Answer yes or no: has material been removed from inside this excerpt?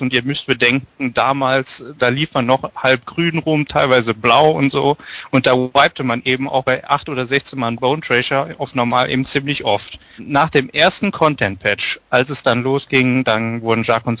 yes